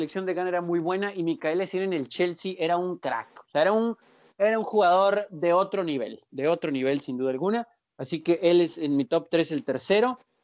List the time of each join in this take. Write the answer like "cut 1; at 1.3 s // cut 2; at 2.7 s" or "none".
none